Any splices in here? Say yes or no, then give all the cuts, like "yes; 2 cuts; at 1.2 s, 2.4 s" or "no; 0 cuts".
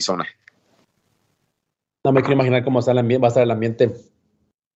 no; 0 cuts